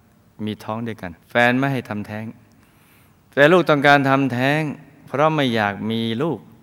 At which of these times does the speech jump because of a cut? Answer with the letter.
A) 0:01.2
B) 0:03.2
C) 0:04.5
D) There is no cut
A